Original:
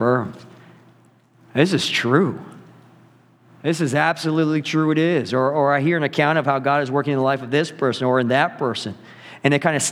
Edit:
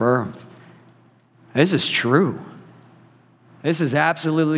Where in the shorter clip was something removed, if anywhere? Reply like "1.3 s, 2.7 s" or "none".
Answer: none